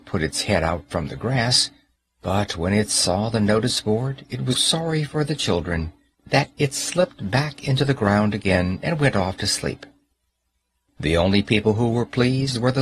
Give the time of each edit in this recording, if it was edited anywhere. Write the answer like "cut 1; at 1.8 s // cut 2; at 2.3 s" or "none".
cut 1; at 4.5 s